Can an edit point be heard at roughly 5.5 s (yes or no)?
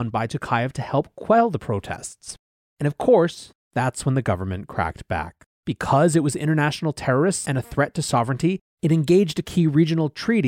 yes